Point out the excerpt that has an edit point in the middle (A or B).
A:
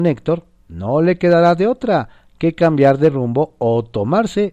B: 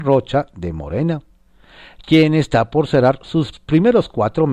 B